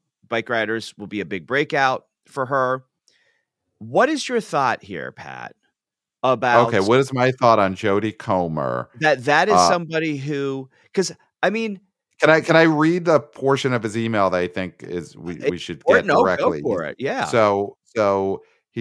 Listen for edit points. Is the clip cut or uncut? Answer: uncut